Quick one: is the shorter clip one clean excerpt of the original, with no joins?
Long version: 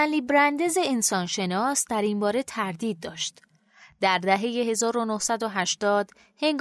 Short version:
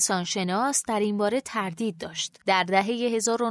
no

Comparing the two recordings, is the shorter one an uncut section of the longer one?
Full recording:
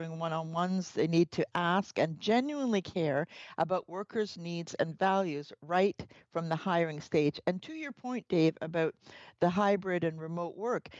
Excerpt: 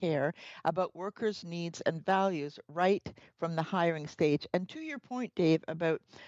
yes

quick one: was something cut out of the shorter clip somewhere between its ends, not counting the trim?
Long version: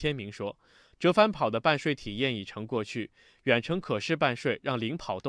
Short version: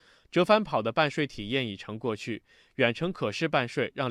no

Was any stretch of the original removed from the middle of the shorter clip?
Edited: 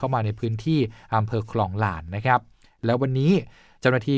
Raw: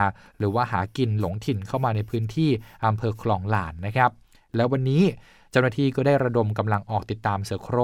no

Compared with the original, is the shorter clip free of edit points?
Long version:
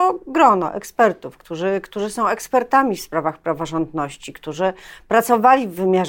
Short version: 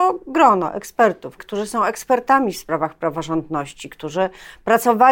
no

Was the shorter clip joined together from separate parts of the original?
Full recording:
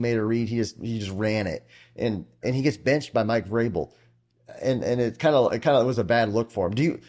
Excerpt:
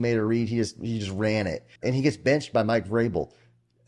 yes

